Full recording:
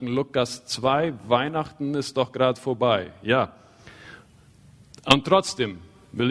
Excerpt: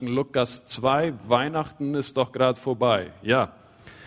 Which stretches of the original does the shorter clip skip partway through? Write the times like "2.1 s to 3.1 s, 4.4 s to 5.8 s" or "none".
none